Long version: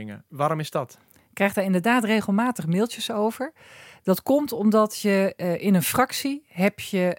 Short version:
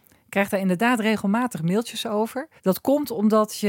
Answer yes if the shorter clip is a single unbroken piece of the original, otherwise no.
no